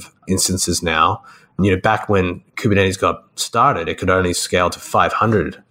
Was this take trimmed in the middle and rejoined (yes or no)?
no